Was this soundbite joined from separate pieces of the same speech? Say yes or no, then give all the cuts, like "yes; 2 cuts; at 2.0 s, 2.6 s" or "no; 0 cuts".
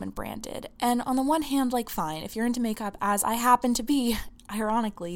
no; 0 cuts